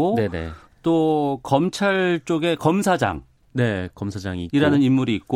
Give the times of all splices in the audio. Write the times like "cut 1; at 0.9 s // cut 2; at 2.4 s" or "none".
none